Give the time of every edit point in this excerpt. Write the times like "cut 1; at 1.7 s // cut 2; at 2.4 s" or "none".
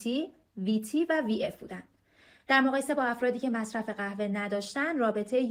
none